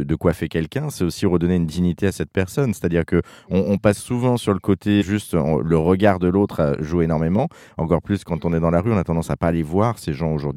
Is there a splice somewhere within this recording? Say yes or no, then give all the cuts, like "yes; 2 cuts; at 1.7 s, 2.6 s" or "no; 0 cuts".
yes; 1 cut; at 5.0 s